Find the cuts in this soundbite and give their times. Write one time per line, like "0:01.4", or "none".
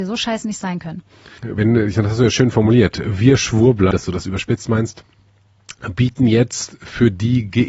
0:01.4
0:03.9